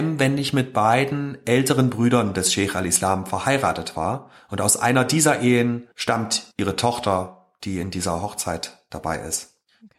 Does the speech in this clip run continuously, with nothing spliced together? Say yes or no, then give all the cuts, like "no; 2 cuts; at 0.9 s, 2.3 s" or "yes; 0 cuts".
yes; 0 cuts